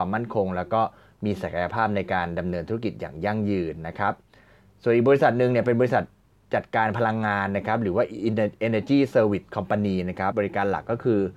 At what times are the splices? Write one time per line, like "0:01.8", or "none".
0:10.3